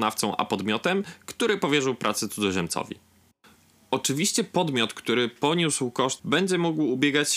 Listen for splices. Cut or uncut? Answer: cut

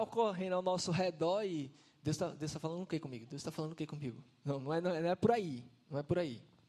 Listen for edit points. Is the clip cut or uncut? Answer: uncut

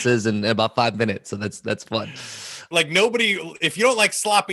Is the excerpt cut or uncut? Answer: cut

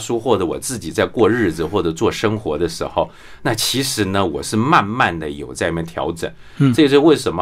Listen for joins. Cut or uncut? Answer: uncut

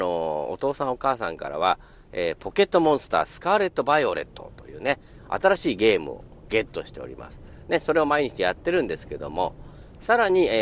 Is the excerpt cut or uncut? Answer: uncut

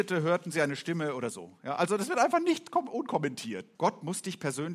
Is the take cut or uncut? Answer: cut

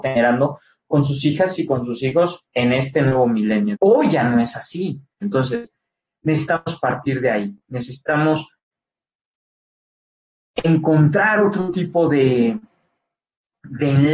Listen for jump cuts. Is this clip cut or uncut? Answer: cut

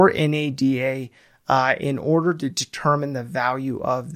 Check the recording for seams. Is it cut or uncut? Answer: uncut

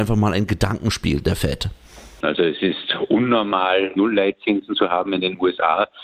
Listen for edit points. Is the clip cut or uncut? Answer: cut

